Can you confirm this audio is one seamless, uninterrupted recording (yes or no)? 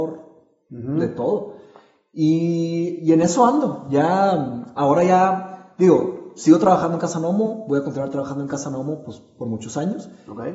yes